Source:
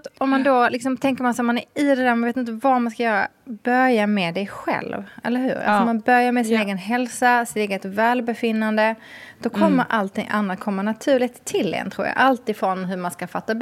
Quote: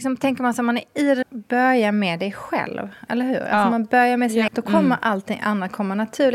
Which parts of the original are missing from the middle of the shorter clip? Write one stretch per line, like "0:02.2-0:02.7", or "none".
0:02.0-0:03.4
0:06.6-0:09.4